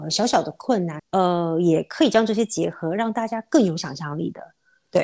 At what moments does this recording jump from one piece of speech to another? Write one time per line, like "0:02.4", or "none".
0:01.0